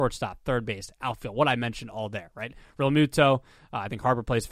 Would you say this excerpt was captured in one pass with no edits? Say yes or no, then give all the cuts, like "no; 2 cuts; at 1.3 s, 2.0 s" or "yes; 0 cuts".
yes; 0 cuts